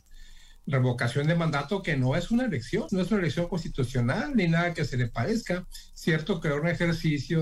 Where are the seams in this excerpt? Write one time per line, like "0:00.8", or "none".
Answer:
0:02.9